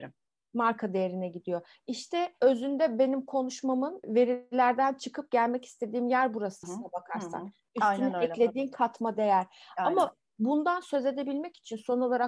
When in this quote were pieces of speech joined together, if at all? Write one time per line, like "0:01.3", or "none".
0:06.6